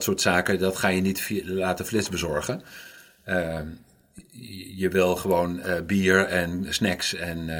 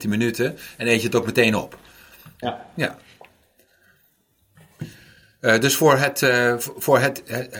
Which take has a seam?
second; 1 cut; at 2.4 s

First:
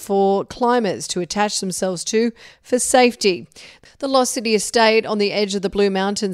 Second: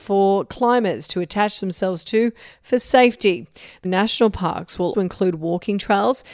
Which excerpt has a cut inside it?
second; 2 cuts; at 3.8 s, 4.9 s

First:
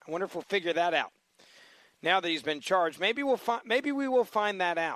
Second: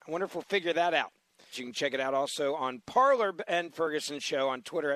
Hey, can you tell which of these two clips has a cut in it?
second; 1 cut; at 1.5 s

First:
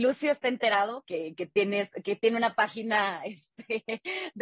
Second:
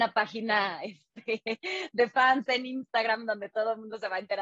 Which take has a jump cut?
first; 1 cut; at 1.0 s

